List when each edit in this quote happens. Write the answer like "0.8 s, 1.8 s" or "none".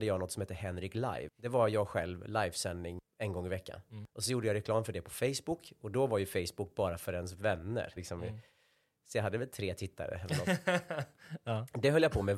8.0 s

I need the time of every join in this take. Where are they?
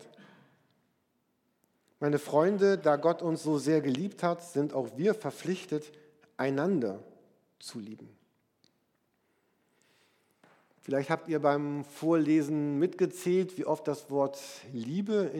none

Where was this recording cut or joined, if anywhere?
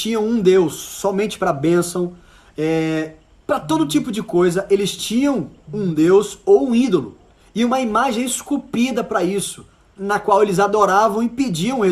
10.0 s

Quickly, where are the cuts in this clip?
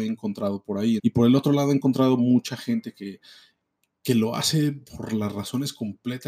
1.0 s

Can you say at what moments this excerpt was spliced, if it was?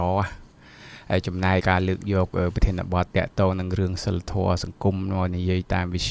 1.6 s

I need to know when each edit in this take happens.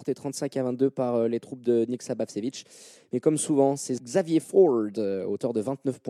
none

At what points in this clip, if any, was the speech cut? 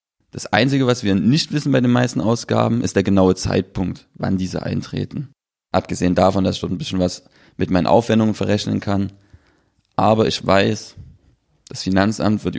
5.5 s

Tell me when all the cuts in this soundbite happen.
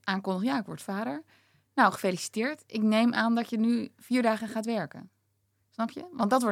none

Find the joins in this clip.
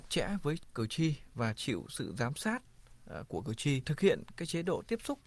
3.8 s

